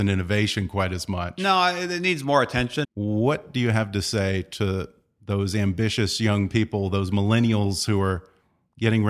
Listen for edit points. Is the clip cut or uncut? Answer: cut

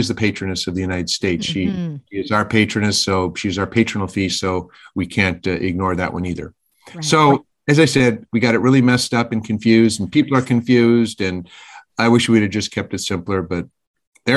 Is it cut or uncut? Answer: uncut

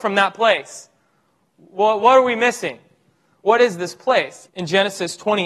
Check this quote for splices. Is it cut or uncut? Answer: cut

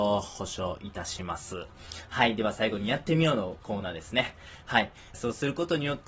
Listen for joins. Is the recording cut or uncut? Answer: cut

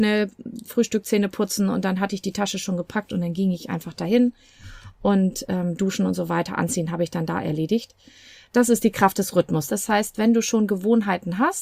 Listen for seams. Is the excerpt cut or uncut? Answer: cut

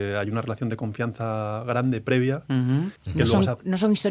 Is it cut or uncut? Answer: cut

